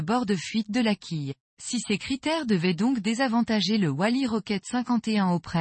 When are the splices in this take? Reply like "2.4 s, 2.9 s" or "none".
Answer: 1.5 s

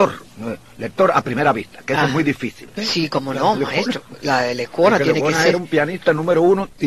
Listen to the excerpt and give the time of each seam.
2.8 s

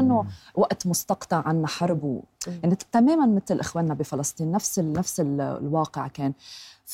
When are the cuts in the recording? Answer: none

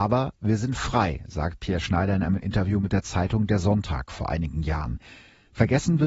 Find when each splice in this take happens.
none

